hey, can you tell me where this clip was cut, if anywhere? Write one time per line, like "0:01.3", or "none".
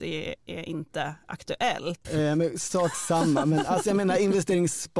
0:02.0